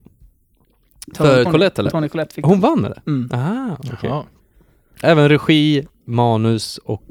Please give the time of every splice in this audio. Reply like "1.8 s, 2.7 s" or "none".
1.4 s, 5.0 s